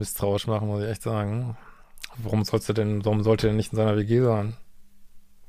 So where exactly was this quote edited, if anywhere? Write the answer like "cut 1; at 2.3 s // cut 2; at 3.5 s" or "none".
cut 1; at 2.1 s